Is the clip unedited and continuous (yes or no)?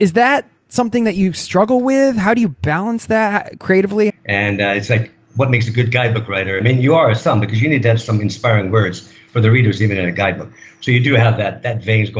no